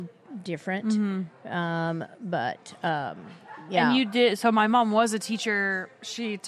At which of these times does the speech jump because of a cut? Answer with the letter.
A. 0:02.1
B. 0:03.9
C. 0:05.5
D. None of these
D